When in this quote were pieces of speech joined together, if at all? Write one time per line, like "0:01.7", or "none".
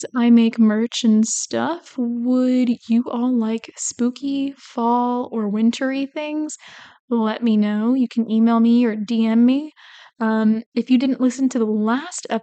none